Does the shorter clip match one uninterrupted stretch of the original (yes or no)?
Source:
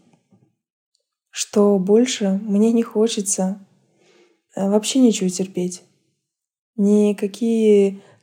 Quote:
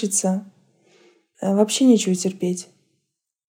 yes